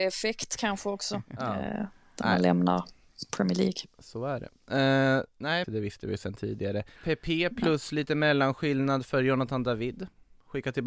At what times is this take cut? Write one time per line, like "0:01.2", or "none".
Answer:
0:05.6
0:07.0